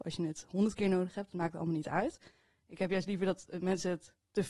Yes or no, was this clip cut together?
no